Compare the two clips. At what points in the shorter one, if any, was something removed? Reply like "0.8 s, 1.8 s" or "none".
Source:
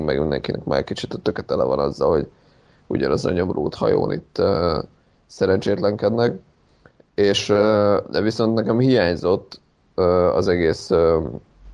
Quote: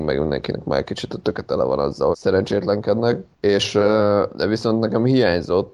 2.1 s, 3.3 s